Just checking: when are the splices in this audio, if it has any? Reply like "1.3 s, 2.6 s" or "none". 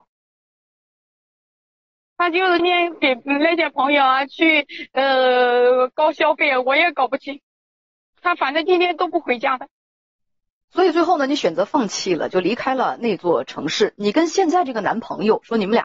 2.6 s